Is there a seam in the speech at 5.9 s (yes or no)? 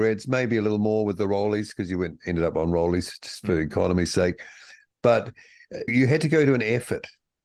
yes